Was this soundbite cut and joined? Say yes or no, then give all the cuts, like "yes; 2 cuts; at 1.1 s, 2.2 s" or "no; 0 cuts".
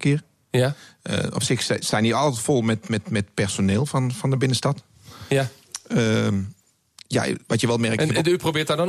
no; 0 cuts